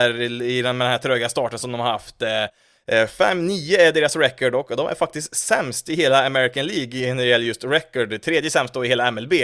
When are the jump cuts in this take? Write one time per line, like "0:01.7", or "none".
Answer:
none